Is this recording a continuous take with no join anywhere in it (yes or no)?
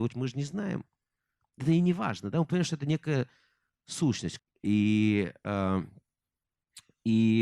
no